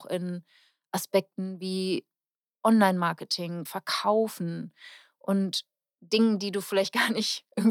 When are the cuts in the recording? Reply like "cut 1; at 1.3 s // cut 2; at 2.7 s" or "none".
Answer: cut 1; at 3.7 s